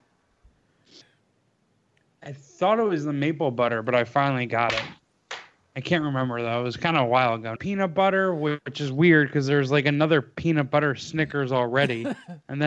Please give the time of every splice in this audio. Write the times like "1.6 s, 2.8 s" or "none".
1.0 s, 7.6 s